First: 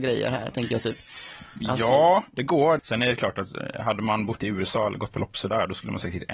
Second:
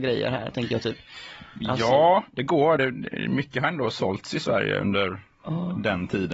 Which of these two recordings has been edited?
first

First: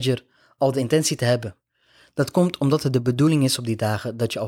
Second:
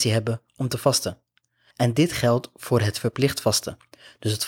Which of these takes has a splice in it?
second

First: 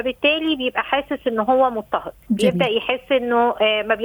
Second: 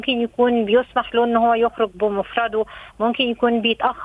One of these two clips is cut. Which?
first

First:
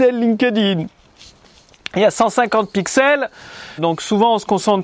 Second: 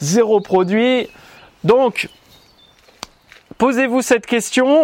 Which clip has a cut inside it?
first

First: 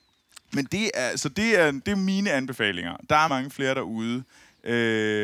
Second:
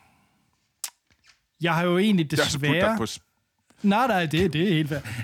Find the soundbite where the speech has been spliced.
first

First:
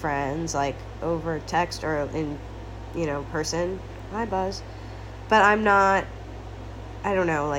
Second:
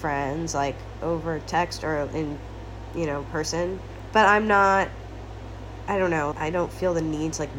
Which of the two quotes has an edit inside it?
second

